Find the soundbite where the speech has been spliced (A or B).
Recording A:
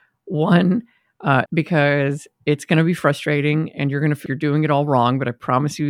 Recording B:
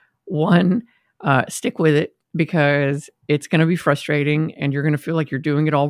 A